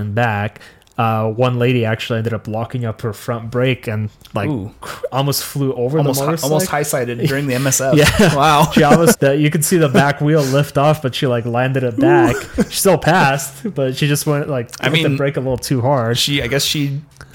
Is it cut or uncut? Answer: cut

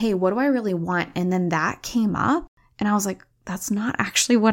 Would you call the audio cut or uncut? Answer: uncut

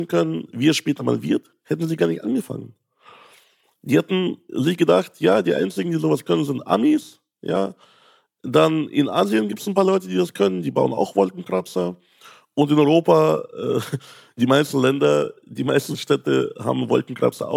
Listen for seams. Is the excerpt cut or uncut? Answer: uncut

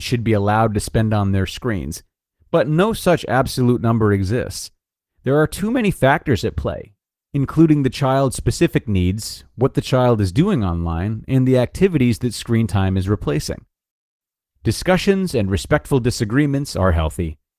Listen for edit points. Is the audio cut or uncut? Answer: uncut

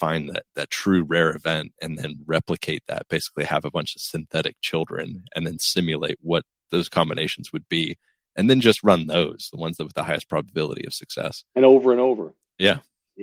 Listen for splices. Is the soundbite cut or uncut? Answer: uncut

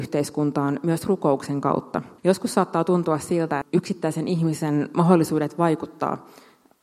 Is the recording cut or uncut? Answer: cut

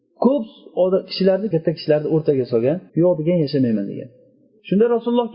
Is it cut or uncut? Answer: cut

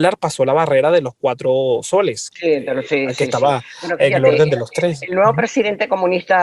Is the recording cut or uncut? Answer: uncut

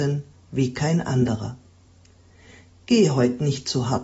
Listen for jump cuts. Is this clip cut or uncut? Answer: uncut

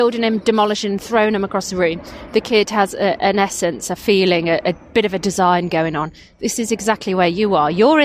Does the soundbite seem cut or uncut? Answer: cut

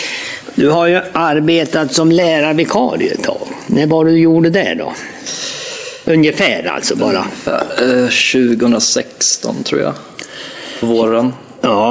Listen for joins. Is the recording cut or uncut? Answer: uncut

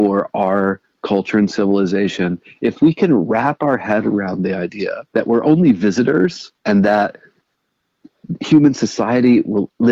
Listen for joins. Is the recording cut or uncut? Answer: cut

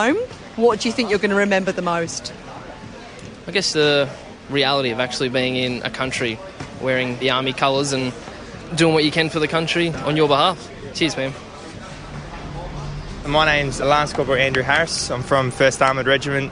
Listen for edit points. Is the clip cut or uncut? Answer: cut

